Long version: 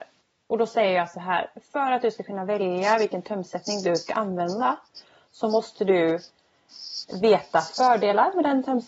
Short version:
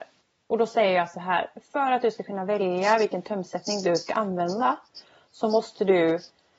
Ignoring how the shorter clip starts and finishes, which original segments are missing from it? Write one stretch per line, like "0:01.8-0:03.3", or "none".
none